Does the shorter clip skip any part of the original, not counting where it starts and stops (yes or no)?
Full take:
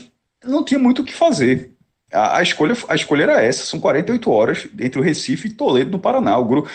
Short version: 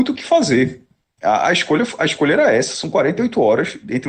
no